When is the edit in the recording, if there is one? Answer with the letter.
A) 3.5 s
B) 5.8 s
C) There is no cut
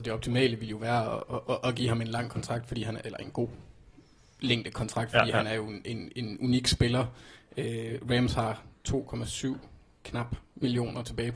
C